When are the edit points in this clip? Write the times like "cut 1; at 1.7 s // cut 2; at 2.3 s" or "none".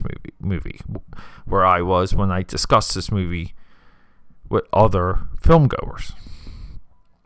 none